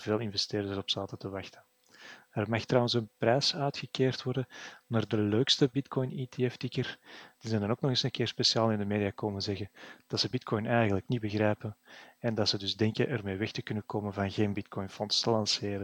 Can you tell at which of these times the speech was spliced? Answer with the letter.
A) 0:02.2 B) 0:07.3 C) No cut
B